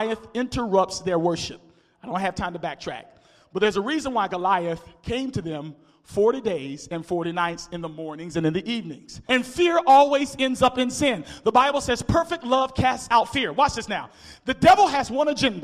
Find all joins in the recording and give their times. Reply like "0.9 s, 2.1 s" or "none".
9.3 s